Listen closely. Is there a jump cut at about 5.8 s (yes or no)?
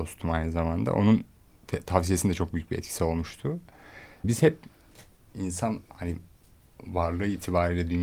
yes